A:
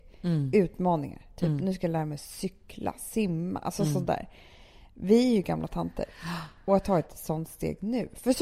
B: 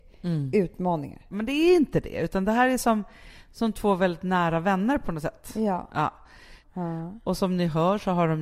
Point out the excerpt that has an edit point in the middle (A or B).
B